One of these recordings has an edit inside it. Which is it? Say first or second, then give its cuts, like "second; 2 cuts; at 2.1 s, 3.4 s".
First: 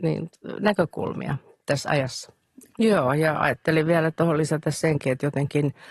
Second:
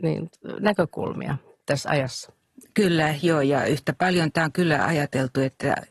first; 1 cut; at 2.7 s